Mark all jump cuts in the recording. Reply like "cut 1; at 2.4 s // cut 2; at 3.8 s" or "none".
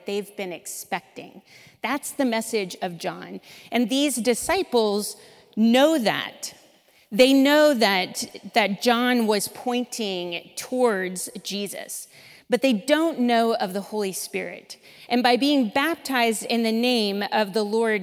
cut 1; at 15.1 s